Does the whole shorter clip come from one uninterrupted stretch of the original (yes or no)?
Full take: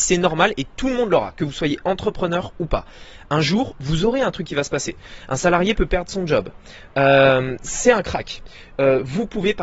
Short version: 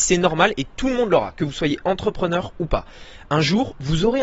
yes